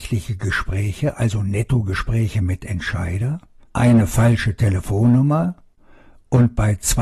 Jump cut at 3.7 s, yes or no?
yes